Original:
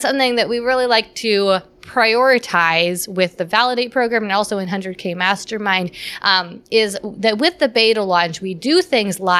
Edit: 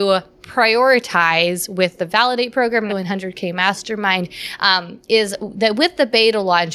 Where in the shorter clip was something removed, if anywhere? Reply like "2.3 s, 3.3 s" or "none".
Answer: 2.9 s

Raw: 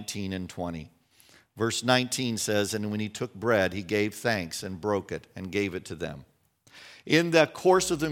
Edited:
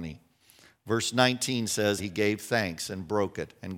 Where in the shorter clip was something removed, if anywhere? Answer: 2.0 s

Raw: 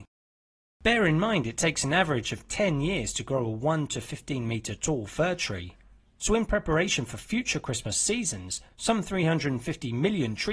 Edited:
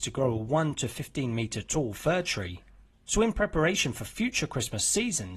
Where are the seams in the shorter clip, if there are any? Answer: none

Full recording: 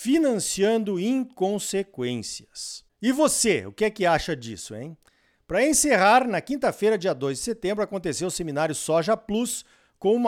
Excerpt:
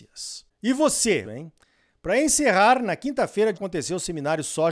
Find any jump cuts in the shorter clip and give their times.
1.2 s, 3.5 s

